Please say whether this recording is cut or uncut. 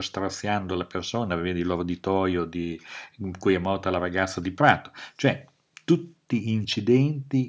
uncut